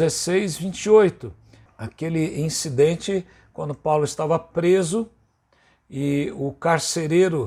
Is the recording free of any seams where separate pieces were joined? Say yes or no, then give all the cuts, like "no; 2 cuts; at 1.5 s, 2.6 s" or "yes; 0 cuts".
no; 1 cut; at 1.7 s